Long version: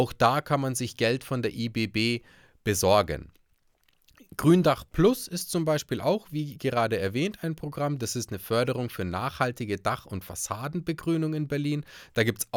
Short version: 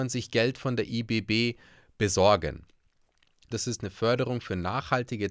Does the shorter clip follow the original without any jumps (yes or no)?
no